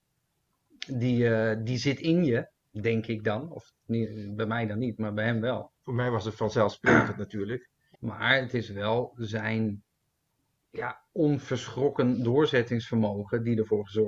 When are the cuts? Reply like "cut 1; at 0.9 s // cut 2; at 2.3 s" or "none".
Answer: cut 1; at 7.9 s // cut 2; at 11.1 s